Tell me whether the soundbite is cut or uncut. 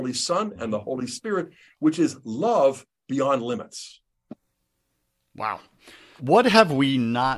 cut